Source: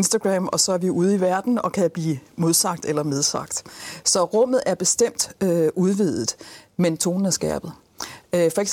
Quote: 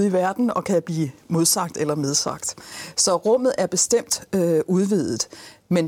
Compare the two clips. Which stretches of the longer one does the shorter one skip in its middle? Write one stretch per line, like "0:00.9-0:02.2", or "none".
none